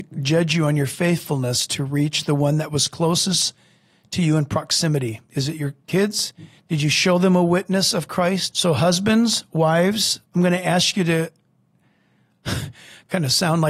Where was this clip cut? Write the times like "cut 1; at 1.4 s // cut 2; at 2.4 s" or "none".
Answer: cut 1; at 6.6 s // cut 2; at 8.5 s // cut 3; at 10.3 s